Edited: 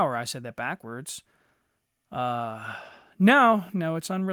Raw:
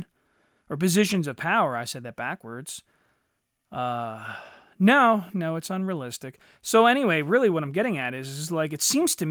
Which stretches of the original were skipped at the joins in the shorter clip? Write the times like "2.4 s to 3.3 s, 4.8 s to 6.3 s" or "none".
none